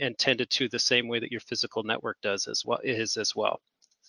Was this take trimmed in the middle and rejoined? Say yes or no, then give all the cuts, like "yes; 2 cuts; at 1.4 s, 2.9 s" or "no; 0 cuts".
no; 0 cuts